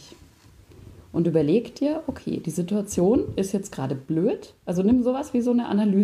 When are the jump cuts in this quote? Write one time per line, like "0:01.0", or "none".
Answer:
none